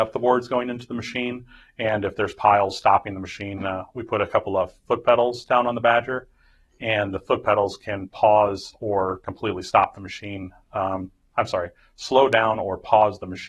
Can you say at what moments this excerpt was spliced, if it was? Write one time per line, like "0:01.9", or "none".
none